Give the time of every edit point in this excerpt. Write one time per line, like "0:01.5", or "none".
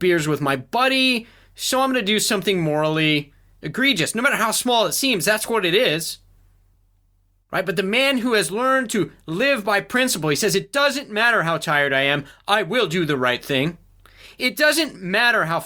none